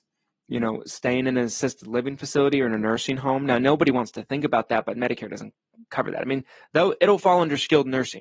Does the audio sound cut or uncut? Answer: uncut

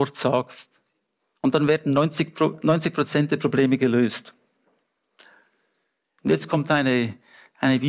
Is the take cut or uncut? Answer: cut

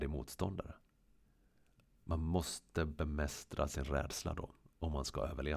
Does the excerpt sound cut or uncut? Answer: uncut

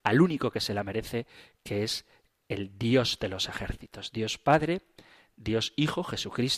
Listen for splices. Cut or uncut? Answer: uncut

